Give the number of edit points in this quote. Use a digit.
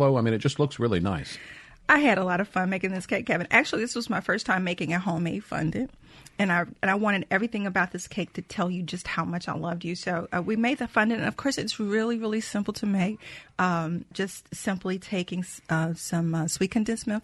1